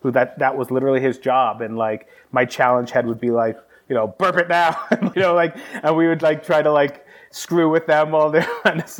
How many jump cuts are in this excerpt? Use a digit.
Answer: 1